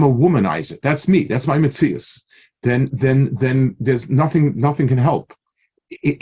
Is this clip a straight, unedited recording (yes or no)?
yes